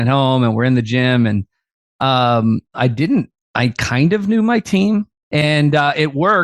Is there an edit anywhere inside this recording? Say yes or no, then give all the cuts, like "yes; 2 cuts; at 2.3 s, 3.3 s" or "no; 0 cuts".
yes; 1 cut; at 5.1 s